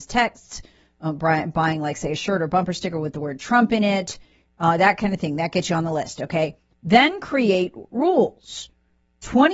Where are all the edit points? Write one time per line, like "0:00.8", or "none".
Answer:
0:06.7